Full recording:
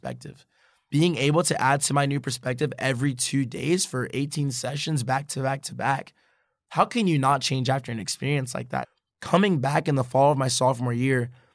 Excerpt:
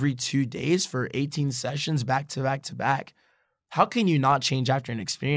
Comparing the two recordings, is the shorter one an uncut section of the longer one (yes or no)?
yes